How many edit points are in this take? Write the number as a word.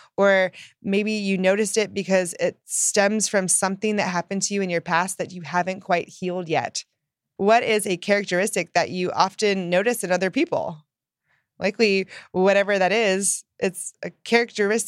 one